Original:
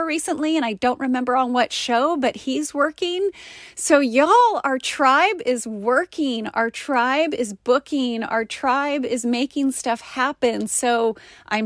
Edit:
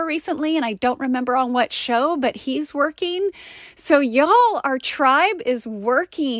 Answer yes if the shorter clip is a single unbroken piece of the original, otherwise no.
yes